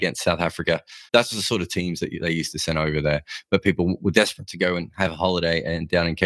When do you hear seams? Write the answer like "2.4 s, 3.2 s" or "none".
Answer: 1.1 s